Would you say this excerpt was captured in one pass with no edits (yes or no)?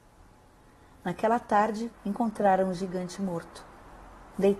no